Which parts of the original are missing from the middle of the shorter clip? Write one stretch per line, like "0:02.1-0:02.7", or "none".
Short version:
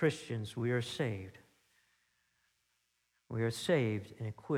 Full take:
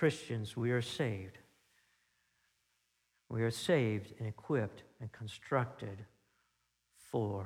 none